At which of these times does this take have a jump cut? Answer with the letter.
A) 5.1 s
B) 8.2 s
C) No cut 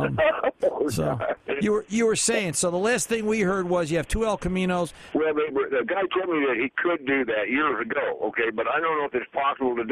A